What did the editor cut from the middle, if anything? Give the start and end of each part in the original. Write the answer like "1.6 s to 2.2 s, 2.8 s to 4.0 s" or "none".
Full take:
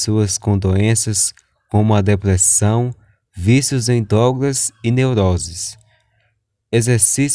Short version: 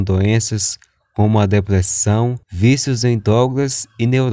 3.0 s to 3.3 s